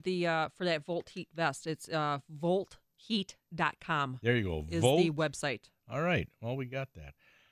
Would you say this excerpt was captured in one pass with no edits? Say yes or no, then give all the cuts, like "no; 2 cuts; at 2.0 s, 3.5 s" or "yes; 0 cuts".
yes; 0 cuts